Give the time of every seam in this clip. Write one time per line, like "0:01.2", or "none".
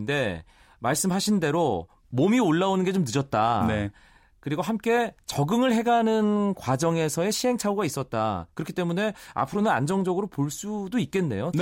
none